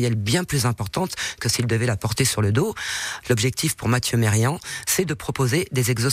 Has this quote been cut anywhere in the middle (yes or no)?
yes